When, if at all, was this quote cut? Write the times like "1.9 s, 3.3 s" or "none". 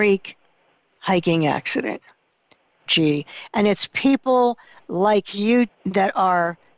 2.9 s, 5.7 s